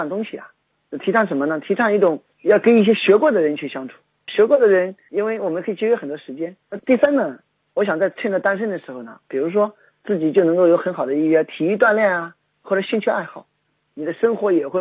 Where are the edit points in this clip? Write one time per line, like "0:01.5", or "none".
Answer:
0:06.6
0:09.2
0:13.9